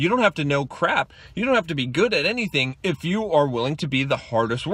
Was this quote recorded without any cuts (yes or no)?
yes